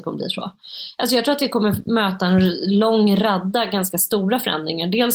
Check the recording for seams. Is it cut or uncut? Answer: uncut